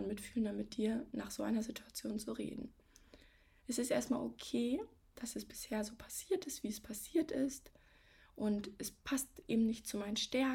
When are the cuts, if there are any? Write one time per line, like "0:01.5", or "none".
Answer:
none